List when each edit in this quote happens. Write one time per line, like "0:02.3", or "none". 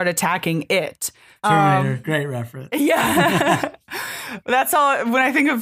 0:01.4